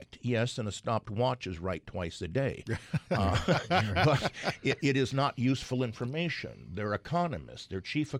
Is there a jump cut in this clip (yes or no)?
no